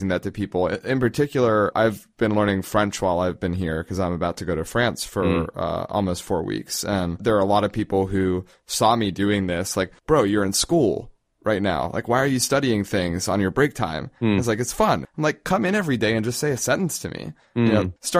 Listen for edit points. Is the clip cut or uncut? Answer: cut